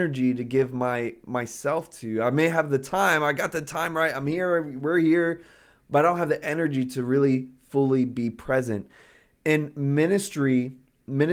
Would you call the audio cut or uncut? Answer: uncut